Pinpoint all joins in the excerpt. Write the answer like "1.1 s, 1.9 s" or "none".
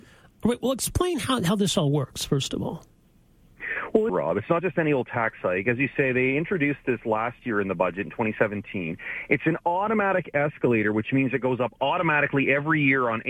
4.1 s